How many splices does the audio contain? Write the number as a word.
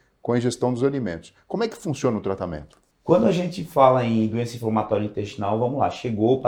one